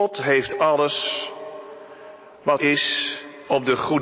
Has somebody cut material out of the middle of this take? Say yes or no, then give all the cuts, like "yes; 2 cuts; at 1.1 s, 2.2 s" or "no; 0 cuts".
yes; 1 cut; at 2.6 s